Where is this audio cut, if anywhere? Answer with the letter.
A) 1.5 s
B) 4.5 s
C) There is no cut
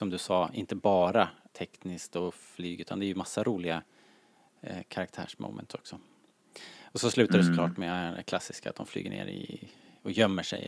A